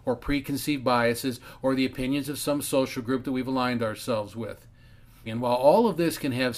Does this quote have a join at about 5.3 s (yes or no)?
yes